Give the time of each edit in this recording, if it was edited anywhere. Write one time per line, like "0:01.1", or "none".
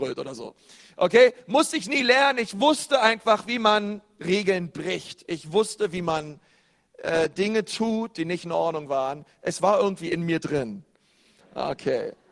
0:11.4